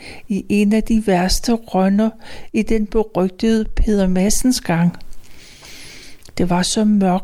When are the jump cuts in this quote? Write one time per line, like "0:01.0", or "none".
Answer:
0:06.3